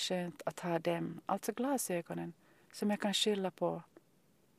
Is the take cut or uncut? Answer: uncut